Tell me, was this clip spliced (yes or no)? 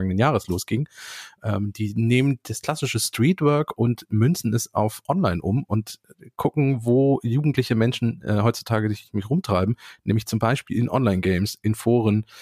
no